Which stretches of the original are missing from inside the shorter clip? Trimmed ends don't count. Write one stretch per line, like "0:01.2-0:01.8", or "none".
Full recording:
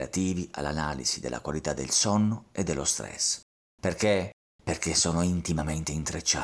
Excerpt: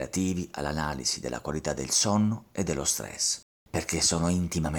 0:03.5-0:04.4